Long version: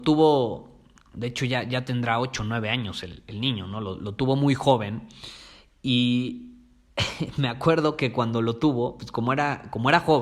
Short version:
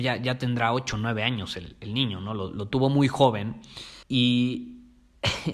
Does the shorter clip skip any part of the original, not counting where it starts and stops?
yes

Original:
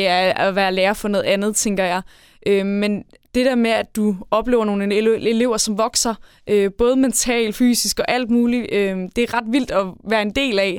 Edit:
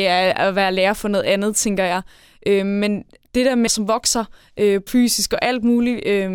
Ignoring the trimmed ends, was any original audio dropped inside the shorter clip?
yes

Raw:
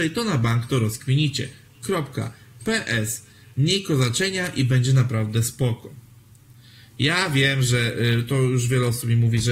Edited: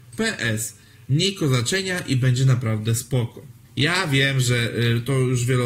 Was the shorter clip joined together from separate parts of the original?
yes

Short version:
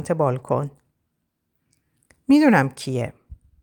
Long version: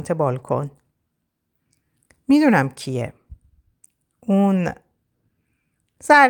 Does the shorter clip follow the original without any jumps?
yes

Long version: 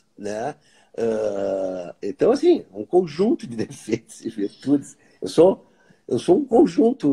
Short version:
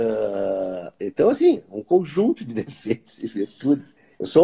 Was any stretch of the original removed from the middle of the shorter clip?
no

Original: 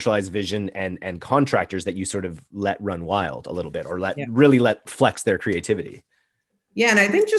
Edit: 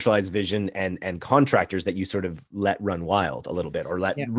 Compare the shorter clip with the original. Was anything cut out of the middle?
no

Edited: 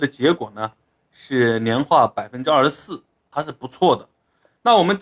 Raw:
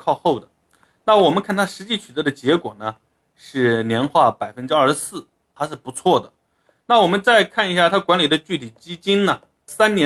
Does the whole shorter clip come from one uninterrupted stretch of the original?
yes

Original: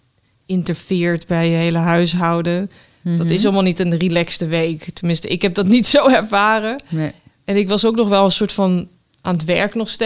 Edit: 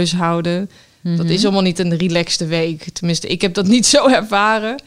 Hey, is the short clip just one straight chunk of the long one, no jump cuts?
yes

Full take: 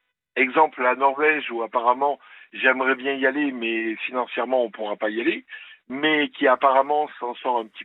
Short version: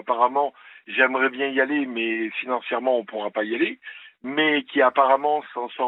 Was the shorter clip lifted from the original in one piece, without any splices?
yes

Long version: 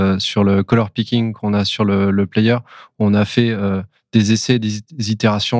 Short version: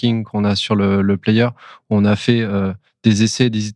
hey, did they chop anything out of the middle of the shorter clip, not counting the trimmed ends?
no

